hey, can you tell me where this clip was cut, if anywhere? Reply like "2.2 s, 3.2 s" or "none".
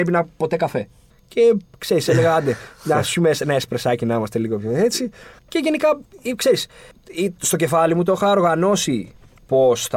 5.4 s